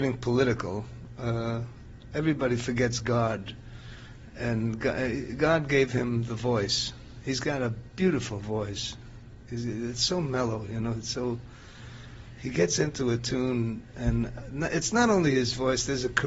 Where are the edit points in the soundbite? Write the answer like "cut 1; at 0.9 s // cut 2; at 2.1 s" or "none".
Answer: none

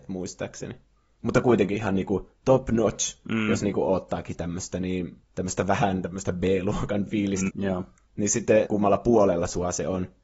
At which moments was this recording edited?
cut 1; at 5.2 s // cut 2; at 7.5 s // cut 3; at 8.6 s

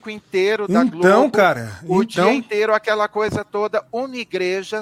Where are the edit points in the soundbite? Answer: none

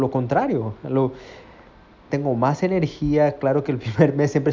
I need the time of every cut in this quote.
cut 1; at 2.1 s

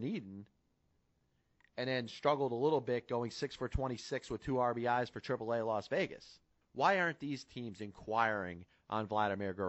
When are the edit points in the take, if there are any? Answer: cut 1; at 6.6 s

